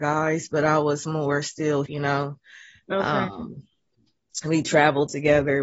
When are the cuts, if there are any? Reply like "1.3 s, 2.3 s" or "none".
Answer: 1.9 s